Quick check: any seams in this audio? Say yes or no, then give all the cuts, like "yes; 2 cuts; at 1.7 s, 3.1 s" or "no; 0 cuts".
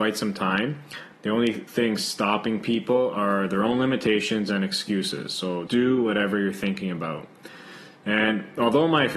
yes; 2 cuts; at 1.1 s, 5.7 s